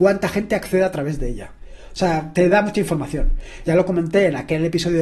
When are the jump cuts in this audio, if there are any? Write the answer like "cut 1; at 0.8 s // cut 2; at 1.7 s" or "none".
cut 1; at 3.6 s